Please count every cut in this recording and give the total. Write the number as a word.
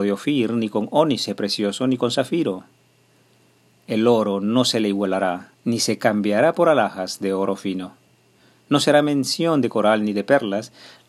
one